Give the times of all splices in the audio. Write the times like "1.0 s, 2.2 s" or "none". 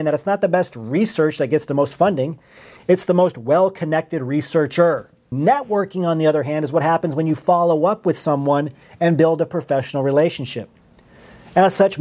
5.3 s